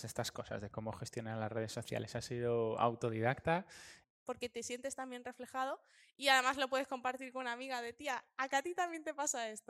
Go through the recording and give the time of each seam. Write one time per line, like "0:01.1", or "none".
0:04.0